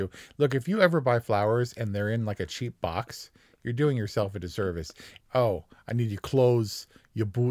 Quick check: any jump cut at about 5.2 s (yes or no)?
yes